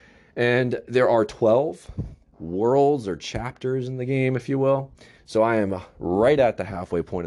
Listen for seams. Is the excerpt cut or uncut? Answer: cut